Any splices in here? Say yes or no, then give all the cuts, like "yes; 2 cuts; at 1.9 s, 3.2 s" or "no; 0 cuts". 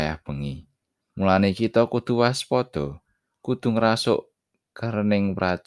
yes; 1 cut; at 1.1 s